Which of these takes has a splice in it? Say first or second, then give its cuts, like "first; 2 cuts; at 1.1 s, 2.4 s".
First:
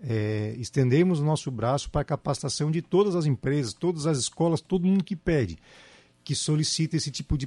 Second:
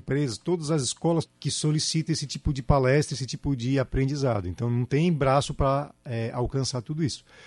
second; 1 cut; at 1.3 s